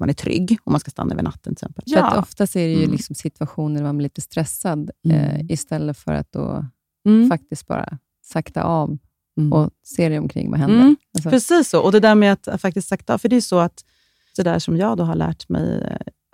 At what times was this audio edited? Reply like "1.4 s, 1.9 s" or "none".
1.9 s, 14.3 s